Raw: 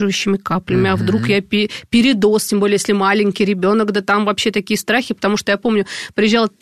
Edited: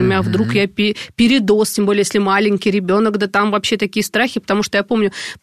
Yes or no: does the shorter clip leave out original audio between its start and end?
no